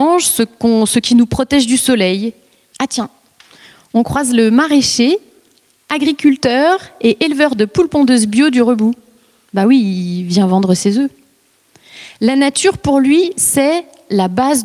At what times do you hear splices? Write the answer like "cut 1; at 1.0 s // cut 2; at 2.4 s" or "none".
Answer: cut 1; at 2.7 s